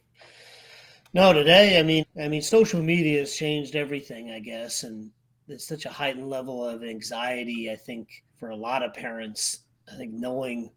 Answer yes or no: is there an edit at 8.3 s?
yes